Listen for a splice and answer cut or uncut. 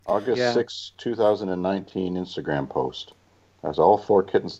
uncut